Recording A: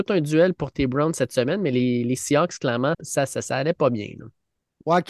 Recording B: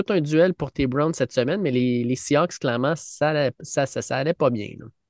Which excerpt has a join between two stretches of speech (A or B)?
A